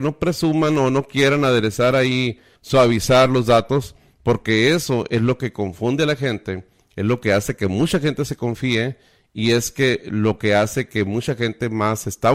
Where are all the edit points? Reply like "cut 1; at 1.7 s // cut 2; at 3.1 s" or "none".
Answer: cut 1; at 2.6 s